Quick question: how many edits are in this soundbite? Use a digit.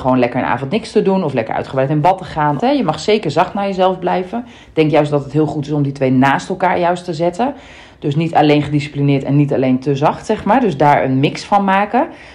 1